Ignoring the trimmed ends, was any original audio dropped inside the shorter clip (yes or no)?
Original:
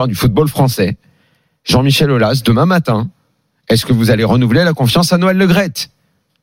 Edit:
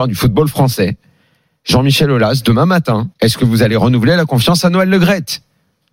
yes